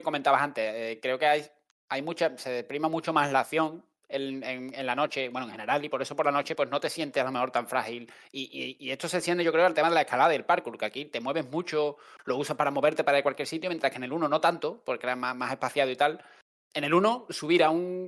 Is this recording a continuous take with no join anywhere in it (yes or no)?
yes